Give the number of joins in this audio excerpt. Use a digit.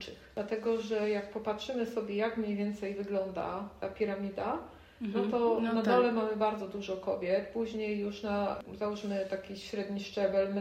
0